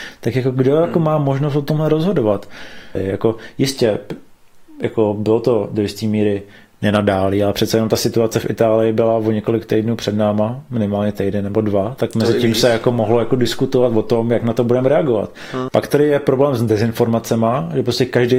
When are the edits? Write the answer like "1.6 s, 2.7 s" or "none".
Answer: 3.0 s, 15.7 s